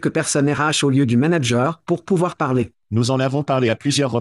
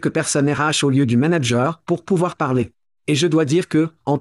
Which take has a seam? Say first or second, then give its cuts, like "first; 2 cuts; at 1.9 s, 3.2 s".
first; 1 cut; at 2.8 s